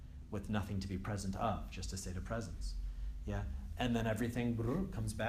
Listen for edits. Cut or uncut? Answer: uncut